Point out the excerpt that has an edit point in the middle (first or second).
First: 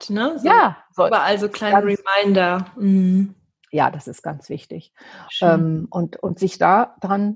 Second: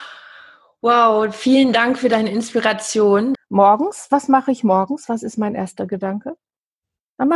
second